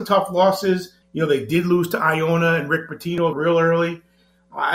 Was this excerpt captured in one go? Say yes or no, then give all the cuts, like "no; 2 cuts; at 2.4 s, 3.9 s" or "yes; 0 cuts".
no; 2 cuts; at 1.0 s, 3.3 s